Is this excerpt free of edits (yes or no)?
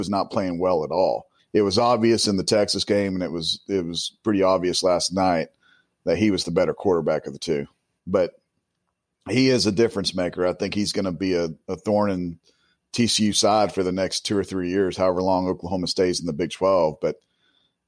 no